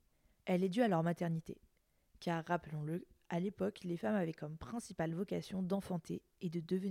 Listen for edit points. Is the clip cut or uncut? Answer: uncut